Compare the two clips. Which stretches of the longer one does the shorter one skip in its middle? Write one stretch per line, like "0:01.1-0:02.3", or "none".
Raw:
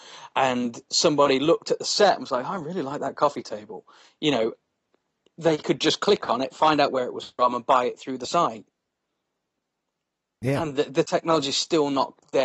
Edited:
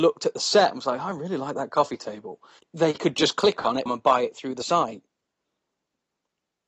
0:04.0-0:05.2
0:06.5-0:07.5